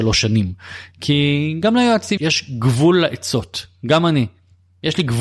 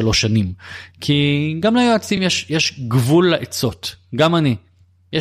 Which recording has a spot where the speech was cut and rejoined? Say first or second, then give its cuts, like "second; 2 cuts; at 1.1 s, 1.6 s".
first; 1 cut; at 2.2 s